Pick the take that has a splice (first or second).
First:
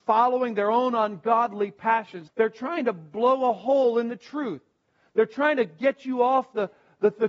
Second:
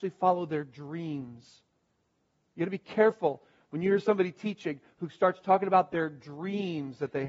first